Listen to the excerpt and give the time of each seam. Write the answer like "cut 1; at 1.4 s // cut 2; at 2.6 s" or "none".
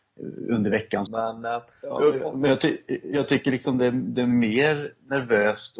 cut 1; at 1.1 s